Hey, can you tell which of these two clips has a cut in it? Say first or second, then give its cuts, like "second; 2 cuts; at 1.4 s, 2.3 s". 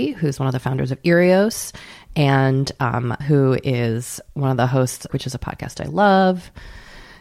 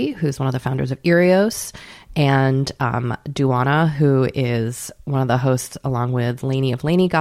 first; 2 cuts; at 3.2 s, 5.1 s